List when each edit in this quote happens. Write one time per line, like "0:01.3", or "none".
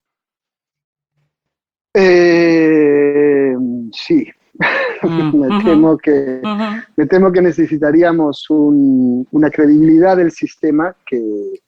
none